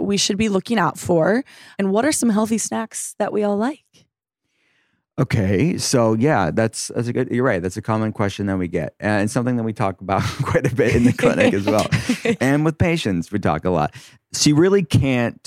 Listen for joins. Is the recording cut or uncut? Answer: uncut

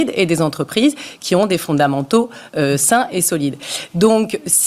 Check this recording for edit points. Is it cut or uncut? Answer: uncut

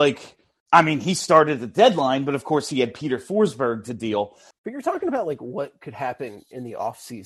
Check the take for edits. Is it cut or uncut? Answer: cut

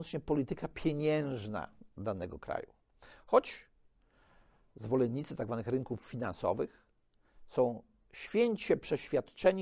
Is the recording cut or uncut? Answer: uncut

